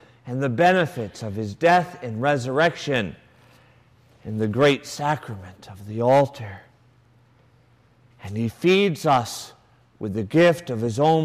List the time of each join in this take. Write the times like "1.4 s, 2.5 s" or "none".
8.1 s